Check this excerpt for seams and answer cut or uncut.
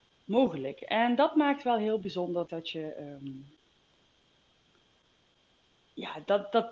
cut